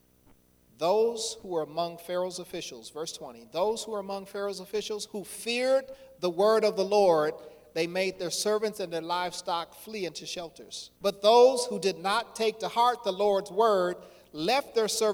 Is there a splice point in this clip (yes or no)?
yes